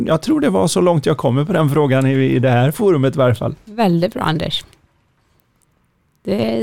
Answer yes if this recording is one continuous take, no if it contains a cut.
yes